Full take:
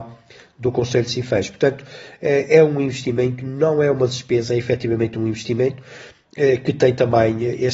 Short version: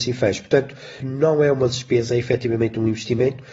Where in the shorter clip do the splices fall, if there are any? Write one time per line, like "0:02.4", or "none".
0:01.0